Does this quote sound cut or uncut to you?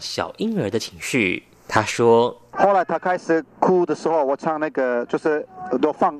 uncut